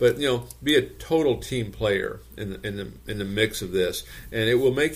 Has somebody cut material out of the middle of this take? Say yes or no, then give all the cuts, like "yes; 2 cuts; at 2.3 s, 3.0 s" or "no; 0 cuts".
no; 0 cuts